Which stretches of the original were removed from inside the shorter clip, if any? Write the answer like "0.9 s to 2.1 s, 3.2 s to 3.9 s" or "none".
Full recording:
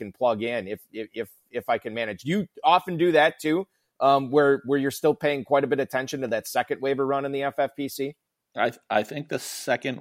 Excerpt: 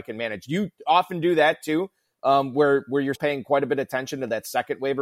4.9 s to 5.2 s